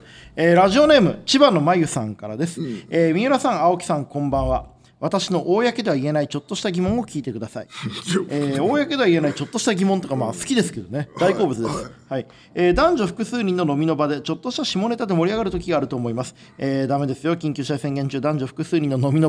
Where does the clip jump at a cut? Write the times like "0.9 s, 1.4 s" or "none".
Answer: none